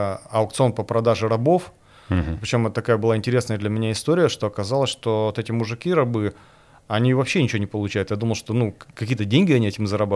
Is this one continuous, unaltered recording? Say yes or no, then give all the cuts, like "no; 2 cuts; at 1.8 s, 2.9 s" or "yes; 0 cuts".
yes; 0 cuts